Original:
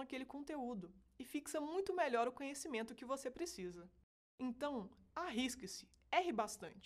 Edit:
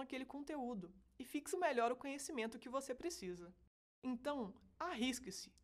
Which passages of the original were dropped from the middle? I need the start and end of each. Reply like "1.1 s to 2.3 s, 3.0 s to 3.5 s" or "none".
1.5 s to 1.9 s